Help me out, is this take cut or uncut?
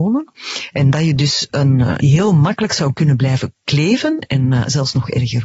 cut